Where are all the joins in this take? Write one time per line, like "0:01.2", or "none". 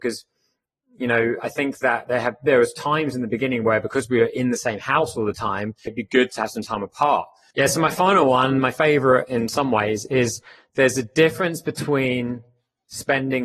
0:05.9
0:07.5